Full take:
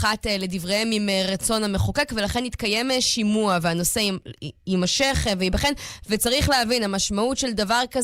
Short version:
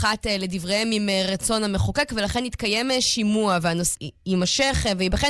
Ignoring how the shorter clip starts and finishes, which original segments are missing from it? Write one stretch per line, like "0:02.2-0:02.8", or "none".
0:03.9-0:04.3